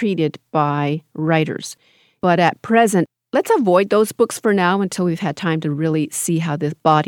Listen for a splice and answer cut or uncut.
uncut